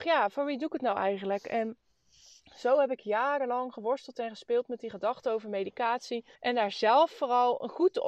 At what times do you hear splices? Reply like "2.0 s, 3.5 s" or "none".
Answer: 6.3 s